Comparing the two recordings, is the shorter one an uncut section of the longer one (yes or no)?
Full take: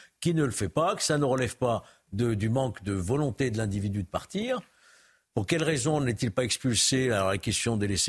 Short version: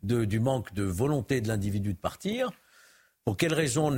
yes